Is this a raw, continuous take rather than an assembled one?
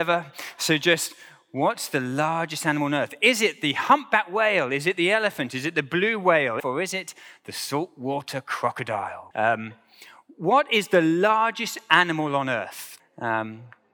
no; 3 cuts; at 6.6 s, 9.3 s, 13.0 s

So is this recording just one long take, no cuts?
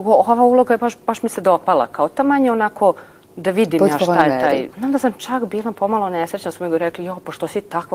no; 1 cut; at 4.7 s

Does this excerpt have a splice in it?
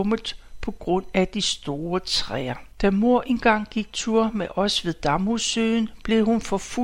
yes; 1 cut; at 2.7 s

